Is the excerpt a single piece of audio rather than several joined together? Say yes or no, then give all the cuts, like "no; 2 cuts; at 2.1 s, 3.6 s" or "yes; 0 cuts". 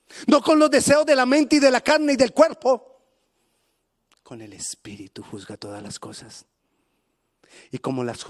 yes; 0 cuts